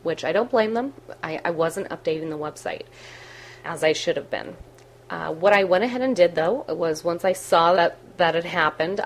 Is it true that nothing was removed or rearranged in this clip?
no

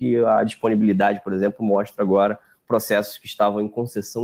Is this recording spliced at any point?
no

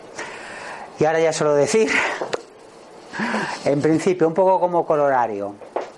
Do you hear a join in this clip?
no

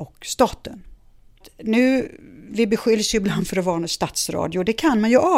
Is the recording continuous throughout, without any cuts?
yes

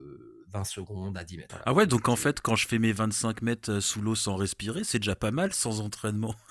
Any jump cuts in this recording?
yes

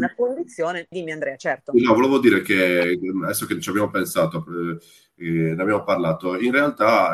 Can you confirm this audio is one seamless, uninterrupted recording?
no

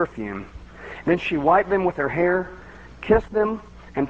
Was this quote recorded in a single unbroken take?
no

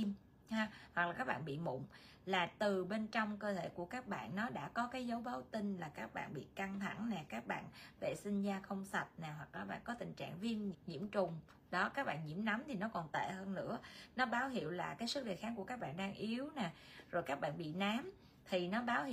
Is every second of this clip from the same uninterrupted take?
no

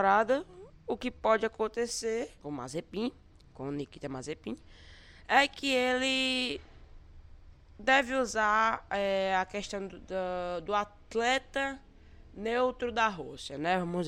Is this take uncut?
yes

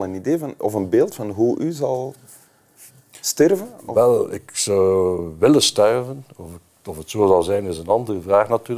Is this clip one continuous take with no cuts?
yes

